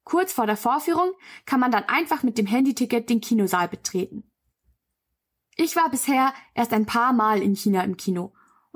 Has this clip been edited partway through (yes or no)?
no